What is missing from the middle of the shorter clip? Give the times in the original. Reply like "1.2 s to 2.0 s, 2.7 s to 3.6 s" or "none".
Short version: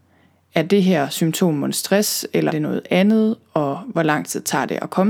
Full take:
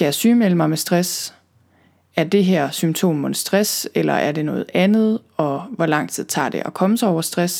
4.1 s to 4.3 s